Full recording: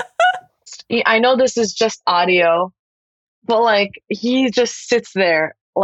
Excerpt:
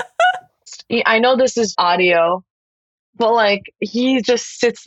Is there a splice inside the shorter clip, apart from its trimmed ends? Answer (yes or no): yes